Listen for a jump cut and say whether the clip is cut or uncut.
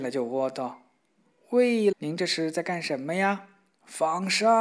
cut